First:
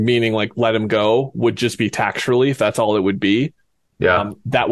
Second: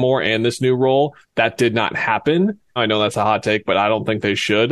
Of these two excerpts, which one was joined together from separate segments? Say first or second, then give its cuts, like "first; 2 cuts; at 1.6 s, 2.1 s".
second; 2 cuts; at 1.2 s, 2.8 s